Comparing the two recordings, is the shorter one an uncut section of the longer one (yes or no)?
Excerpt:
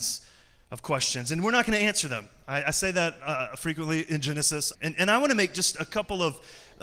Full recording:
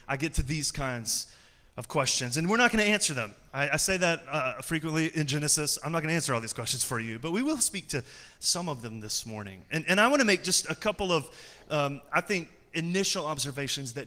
no